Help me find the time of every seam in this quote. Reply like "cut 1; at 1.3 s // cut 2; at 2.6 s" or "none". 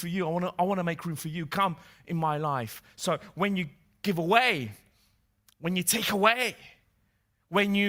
none